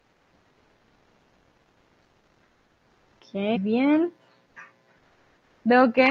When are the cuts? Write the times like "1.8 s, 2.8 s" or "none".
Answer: 3.5 s